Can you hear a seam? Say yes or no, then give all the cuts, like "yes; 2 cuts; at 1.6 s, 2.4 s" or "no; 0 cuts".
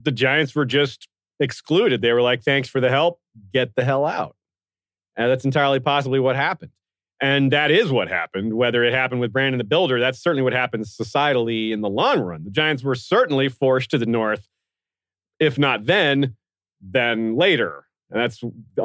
no; 0 cuts